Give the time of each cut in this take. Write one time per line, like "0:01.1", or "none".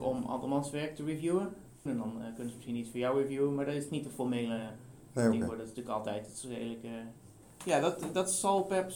0:01.9